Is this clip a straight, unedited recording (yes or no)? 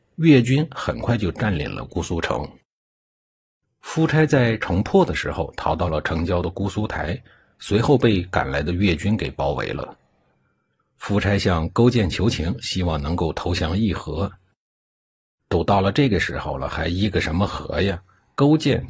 yes